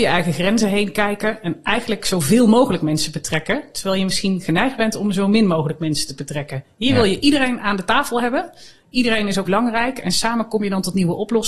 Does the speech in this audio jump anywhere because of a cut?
yes; 1 cut; at 9.5 s

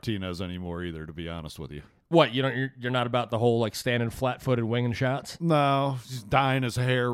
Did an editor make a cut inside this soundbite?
no; 0 cuts

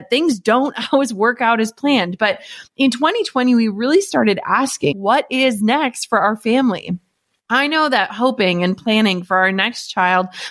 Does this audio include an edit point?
yes; 1 cut; at 4.9 s

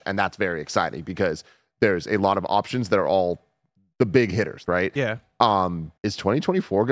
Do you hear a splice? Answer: yes; 2 cuts; at 4.7 s, 6.0 s

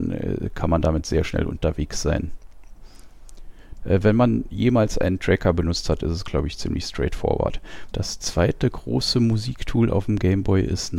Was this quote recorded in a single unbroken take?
no; 2 cuts; at 3.8 s, 7.9 s

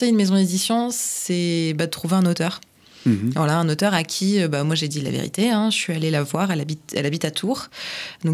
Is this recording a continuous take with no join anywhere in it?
yes; 0 cuts

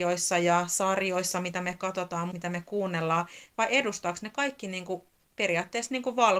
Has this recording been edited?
yes; 1 cut; at 2.3 s

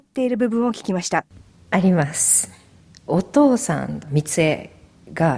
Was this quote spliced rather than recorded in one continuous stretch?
yes; 1 cut; at 4.0 s

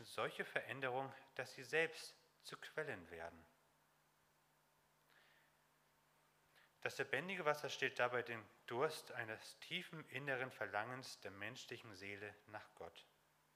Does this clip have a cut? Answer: no; 0 cuts

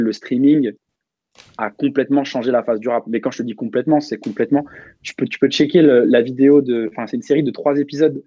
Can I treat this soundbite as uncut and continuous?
yes; 0 cuts

